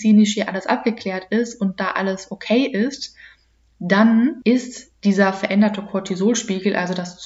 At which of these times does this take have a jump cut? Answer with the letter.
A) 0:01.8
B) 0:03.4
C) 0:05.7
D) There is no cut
D